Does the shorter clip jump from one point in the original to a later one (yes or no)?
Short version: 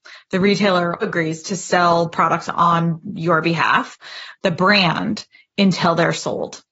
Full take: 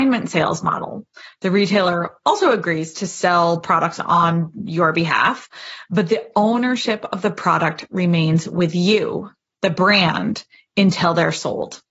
yes